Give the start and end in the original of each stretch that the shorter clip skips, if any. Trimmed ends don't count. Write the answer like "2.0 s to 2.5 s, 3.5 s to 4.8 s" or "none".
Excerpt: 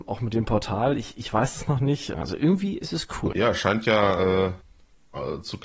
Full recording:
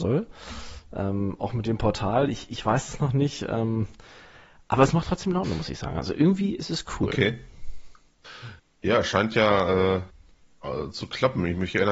3.5 s to 5.9 s, 7.1 s to 8.8 s